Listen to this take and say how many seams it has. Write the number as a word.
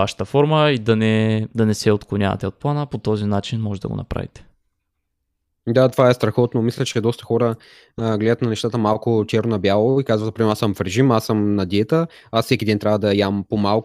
zero